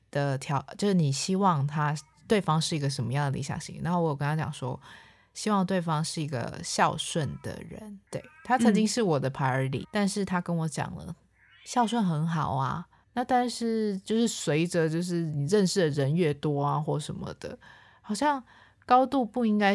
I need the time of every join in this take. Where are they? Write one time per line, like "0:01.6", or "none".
0:09.8
0:13.0